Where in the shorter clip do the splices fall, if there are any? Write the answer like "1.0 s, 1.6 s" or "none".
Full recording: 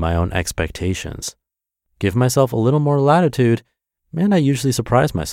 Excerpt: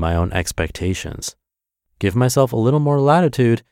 none